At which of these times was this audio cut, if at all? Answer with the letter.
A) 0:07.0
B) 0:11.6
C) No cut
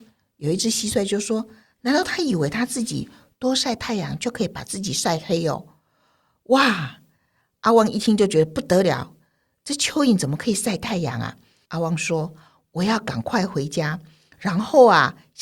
B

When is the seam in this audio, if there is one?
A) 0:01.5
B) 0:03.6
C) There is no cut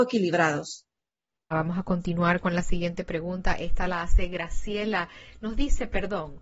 A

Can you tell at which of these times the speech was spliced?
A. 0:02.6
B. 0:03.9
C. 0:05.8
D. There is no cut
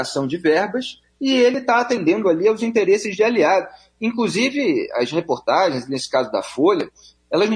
D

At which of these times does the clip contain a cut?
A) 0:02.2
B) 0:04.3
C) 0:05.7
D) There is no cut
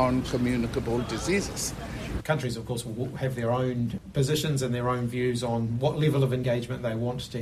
A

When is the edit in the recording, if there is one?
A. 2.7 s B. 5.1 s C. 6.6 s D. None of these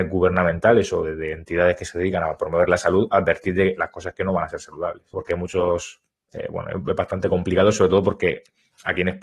B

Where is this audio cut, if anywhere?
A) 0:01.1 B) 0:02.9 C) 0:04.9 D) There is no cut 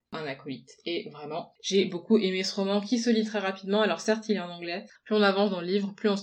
C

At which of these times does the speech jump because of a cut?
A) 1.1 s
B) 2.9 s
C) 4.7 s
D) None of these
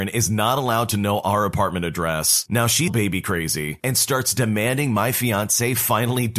B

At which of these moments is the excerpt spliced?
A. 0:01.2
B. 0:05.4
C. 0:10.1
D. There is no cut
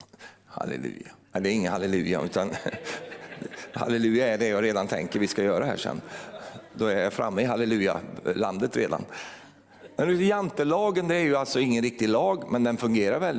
A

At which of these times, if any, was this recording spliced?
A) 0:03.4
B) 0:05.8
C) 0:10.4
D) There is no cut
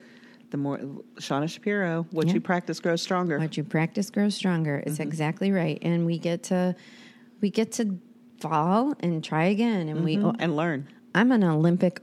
C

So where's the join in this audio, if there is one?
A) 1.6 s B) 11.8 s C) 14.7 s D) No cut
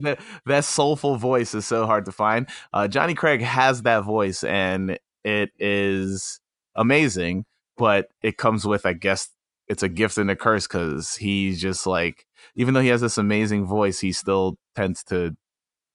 C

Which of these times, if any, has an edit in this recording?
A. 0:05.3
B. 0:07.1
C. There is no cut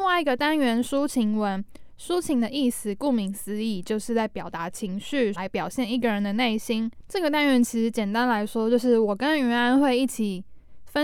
A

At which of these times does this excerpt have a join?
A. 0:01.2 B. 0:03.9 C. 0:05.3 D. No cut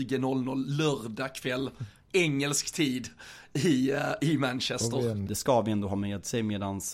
C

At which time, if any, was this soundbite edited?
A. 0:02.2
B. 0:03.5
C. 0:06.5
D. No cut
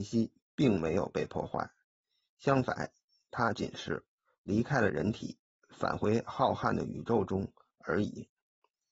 B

